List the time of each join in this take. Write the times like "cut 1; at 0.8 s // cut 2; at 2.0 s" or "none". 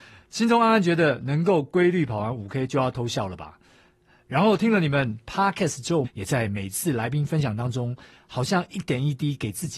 cut 1; at 6.0 s